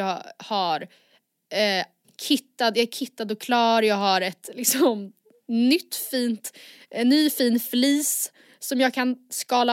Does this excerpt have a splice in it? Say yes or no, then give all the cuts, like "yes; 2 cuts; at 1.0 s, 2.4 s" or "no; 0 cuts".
no; 0 cuts